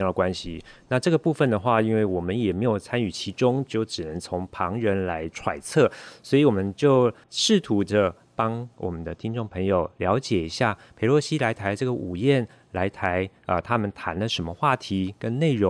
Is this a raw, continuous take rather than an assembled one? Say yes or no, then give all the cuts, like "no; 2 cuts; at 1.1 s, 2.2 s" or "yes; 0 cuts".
yes; 0 cuts